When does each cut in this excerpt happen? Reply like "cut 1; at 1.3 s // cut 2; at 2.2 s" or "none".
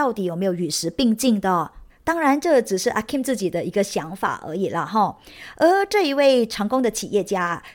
none